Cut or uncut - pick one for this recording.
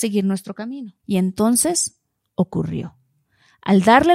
cut